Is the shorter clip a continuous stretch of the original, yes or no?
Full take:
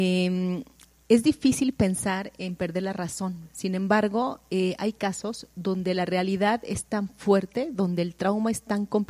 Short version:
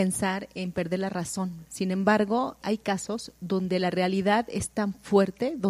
no